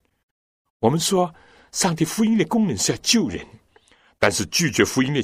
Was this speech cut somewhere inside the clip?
no; 0 cuts

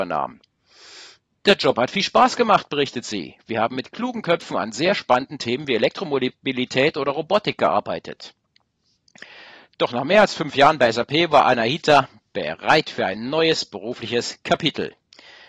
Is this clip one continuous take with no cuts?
yes; 0 cuts

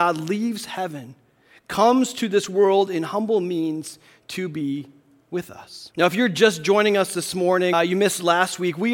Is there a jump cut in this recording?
yes; 2 cuts; at 5.9 s, 7.7 s

